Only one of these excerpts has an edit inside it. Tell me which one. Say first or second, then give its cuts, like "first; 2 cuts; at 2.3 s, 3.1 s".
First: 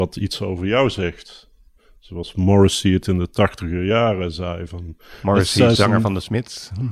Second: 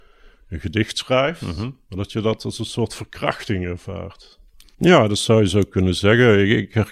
second; 2 cuts; at 1.8 s, 4.6 s